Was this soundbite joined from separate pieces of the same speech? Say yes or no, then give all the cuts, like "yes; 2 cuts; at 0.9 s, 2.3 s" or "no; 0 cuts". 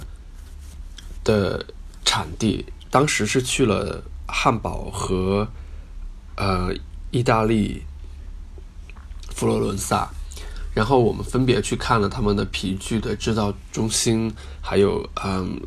no; 0 cuts